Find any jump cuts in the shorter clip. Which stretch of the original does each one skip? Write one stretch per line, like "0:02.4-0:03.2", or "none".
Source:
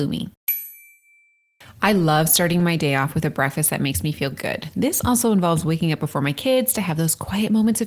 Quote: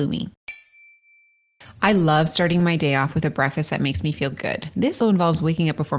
0:05.0-0:05.2